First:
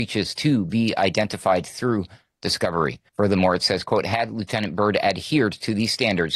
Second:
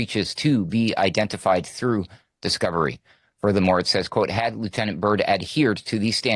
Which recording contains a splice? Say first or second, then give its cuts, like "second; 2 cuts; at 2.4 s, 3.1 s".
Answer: first; 1 cut; at 3.1 s